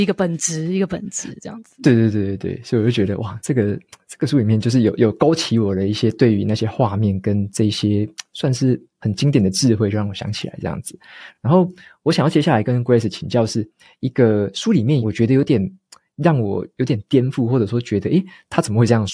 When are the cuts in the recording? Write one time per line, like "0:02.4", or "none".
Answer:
none